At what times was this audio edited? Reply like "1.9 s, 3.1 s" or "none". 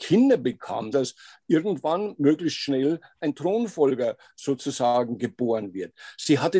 0.9 s